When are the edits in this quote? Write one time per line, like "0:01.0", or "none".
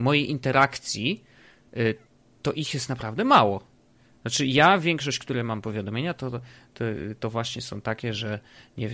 none